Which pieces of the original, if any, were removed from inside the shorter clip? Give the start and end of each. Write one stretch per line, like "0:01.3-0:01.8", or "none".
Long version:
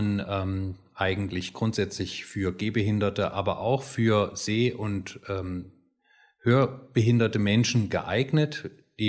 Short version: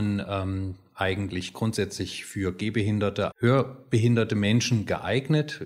0:03.3-0:06.3